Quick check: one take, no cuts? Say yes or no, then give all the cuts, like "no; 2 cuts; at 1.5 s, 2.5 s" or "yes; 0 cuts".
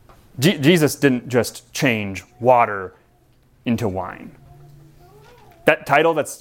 yes; 0 cuts